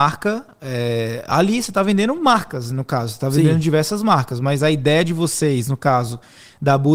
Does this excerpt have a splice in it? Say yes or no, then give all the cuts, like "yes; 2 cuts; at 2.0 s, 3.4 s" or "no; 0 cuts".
no; 0 cuts